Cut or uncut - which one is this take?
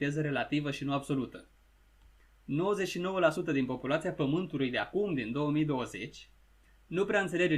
uncut